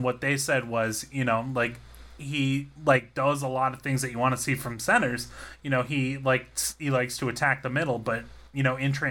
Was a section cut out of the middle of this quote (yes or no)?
no